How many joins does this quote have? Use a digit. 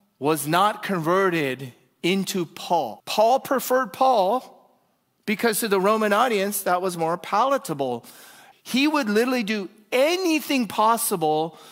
2